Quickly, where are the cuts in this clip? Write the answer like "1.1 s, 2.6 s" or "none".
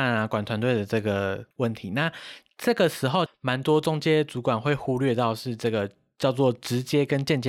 1.5 s, 3.3 s